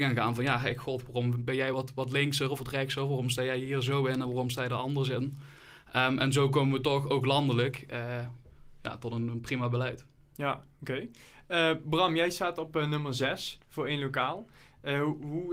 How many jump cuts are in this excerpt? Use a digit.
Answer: 0